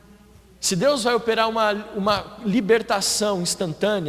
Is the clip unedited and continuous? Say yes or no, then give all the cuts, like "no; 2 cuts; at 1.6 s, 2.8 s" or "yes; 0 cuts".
yes; 0 cuts